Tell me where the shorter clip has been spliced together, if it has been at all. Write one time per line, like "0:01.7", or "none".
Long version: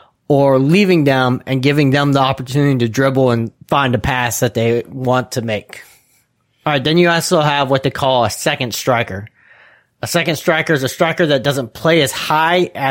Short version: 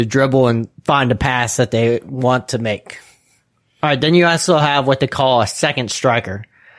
none